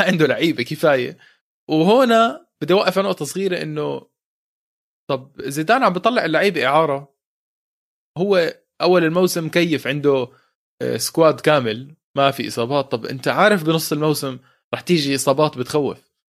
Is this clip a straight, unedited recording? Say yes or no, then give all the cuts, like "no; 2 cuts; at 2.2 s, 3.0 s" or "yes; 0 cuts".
yes; 0 cuts